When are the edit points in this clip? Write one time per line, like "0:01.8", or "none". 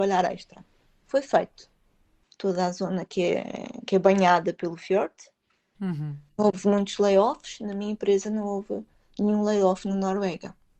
0:02.2
0:05.7